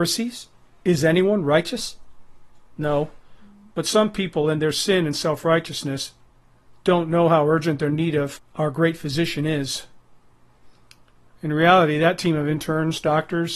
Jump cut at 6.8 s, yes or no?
no